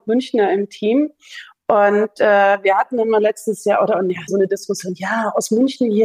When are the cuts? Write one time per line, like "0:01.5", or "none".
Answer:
0:04.3